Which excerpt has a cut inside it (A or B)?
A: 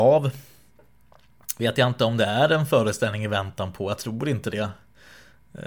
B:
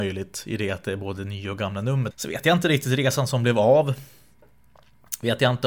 B